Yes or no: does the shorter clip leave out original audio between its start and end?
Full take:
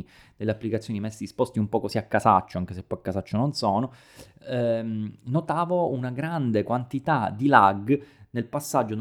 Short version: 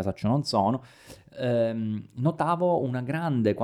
no